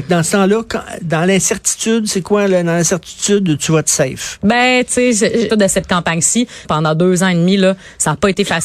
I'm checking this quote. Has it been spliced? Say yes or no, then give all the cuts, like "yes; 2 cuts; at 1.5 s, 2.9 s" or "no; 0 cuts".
yes; 2 cuts; at 5.5 s, 6.6 s